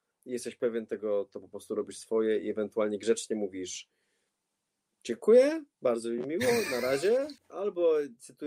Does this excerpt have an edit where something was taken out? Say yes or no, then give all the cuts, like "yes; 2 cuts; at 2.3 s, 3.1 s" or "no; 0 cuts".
yes; 1 cut; at 7.4 s